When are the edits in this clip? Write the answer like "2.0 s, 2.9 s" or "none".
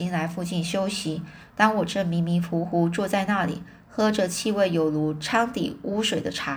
none